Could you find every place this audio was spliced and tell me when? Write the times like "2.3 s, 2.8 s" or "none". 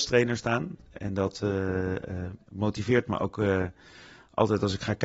none